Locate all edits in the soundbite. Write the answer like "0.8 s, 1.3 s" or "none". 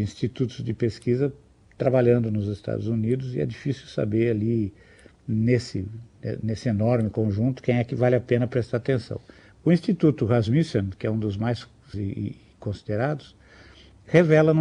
9.5 s, 11.9 s